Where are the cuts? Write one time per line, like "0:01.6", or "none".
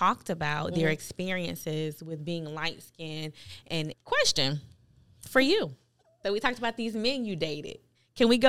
0:03.9
0:06.2